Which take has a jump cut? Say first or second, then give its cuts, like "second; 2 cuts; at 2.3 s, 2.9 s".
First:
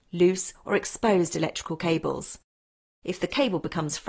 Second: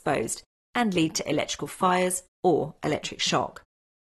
first; 1 cut; at 3.0 s